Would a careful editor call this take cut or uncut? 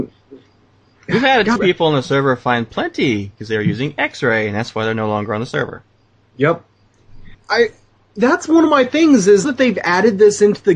cut